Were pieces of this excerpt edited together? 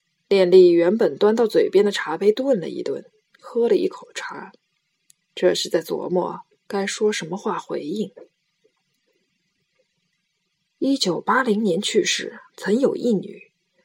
yes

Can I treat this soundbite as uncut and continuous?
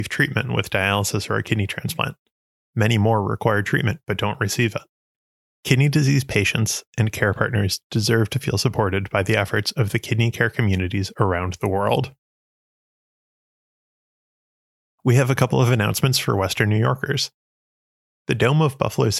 yes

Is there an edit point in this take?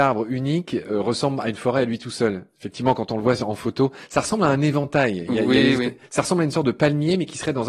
no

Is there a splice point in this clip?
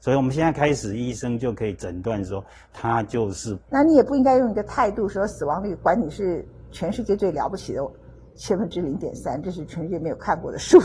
yes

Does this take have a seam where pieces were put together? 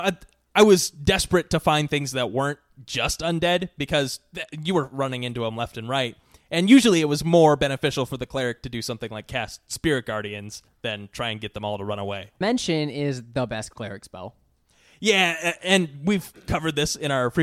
yes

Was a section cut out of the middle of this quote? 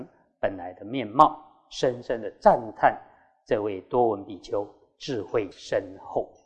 no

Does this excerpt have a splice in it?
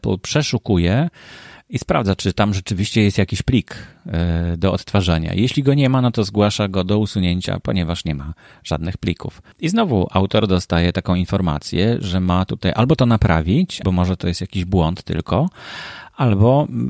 yes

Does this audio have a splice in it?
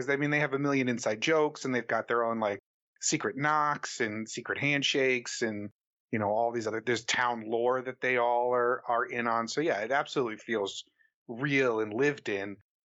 no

